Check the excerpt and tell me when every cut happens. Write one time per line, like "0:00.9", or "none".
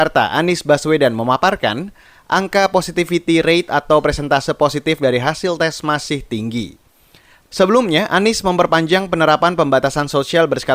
0:07.5